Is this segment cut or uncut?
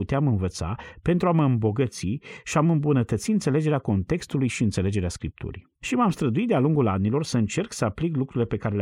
cut